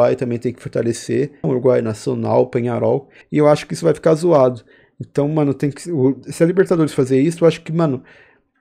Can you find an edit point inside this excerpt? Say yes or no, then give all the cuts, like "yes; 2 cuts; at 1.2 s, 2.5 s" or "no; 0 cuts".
yes; 2 cuts; at 1.4 s, 3.2 s